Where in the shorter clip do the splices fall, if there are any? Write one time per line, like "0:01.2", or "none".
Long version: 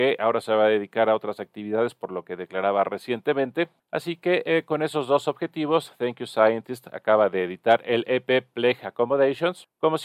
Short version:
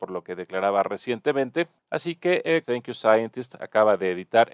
0:02.6

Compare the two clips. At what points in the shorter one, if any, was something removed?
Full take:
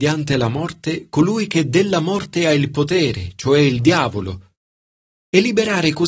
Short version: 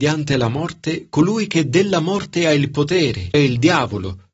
0:03.3

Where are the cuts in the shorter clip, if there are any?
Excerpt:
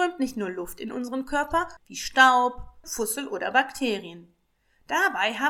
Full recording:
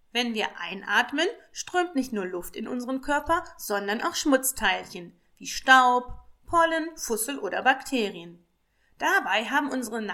0:01.8
0:02.8

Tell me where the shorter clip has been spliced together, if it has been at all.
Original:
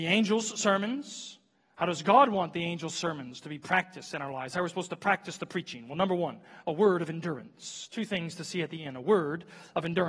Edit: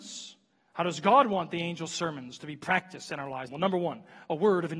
0:03.5

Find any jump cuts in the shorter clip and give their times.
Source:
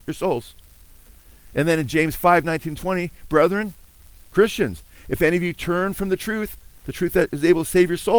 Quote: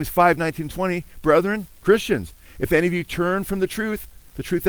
0:01.7

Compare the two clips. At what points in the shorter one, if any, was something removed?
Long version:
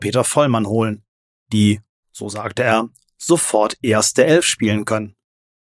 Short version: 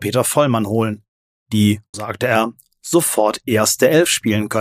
0:01.9

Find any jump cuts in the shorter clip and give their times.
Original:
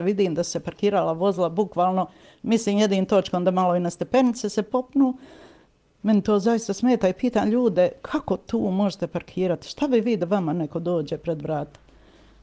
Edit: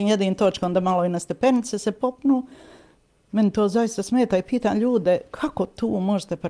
none

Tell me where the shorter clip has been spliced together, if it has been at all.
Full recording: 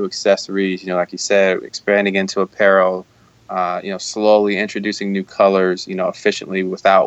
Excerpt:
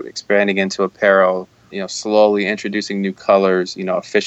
0:01.7

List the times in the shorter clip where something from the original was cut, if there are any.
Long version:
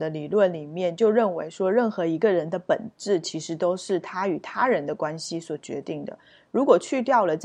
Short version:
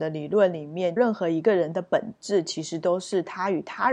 0:01.0

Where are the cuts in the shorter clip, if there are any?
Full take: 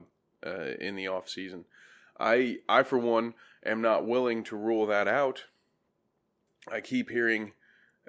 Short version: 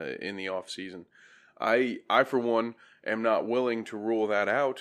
none

